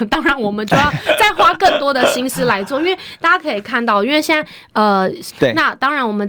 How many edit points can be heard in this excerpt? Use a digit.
1